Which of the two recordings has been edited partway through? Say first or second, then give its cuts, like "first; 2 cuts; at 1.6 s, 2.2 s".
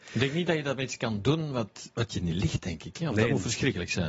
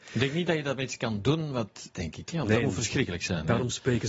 second; 1 cut; at 1.9 s